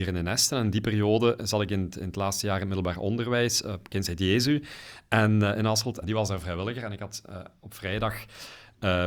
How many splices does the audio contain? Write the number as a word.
one